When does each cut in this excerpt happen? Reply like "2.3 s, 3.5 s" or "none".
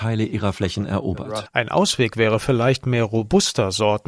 1.5 s